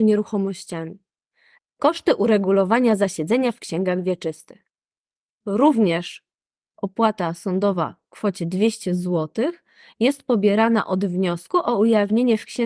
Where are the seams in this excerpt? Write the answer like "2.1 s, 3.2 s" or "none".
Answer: 1.6 s, 5.3 s